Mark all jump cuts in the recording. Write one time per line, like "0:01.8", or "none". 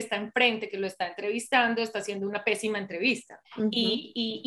0:03.4